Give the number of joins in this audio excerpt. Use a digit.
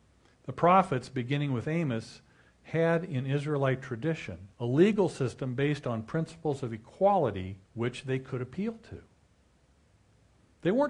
2